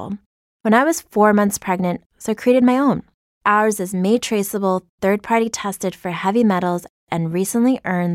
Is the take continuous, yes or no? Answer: no